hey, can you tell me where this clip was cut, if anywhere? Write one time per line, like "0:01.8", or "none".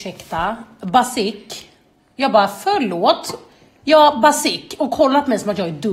none